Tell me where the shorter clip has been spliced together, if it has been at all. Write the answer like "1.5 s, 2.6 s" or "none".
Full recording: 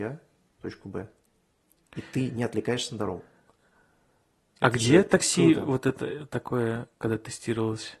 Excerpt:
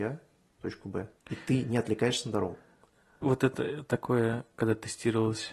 1.2 s, 3.2 s